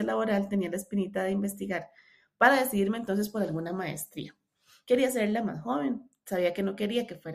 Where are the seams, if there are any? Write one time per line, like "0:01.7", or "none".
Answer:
none